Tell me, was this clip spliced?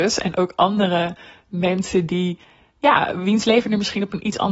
no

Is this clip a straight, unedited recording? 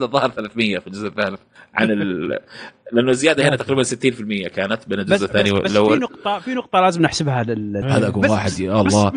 no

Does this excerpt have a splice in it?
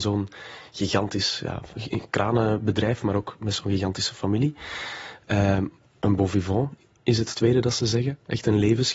no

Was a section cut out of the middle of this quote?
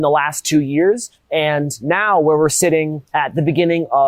no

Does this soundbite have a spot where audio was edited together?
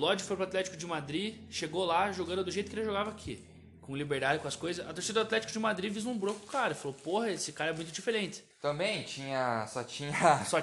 no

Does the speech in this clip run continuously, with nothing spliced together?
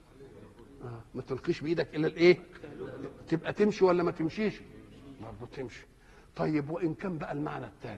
yes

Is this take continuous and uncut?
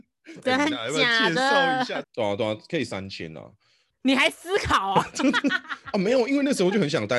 no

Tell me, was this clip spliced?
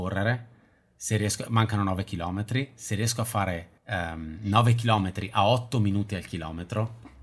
yes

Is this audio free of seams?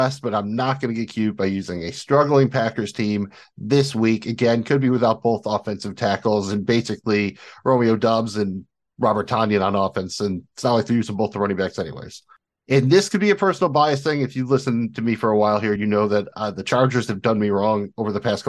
yes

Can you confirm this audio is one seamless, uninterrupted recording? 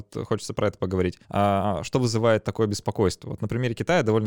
no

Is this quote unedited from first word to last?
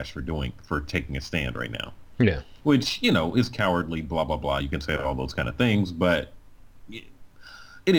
yes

